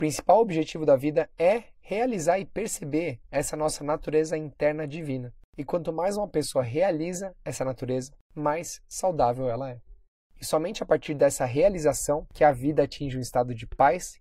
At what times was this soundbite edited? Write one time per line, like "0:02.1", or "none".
none